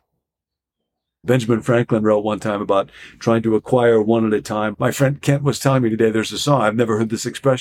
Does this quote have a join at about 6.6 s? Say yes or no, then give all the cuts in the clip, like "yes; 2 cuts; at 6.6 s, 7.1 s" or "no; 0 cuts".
no; 2 cuts; at 1.2 s, 4.7 s